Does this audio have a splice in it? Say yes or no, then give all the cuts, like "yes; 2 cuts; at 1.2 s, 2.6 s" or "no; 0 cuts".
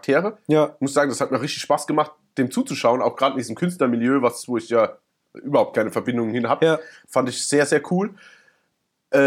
no; 0 cuts